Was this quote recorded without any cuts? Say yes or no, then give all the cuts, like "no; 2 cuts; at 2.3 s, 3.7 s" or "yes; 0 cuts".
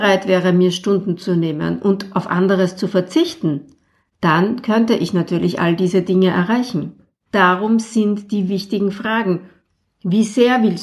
no; 2 cuts; at 7.3 s, 8.5 s